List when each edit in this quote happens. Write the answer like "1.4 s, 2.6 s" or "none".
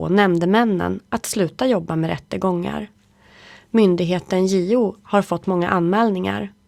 none